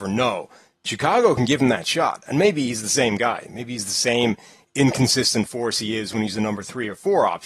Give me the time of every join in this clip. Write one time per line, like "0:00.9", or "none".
none

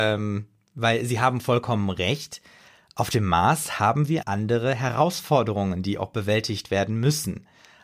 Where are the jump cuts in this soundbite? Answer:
0:04.2

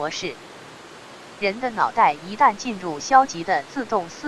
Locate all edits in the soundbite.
none

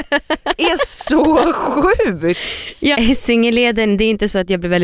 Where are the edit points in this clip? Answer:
0:02.9

